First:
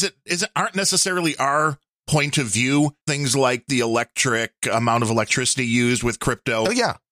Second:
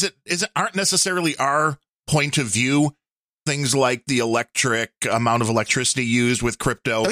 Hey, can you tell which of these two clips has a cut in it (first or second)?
first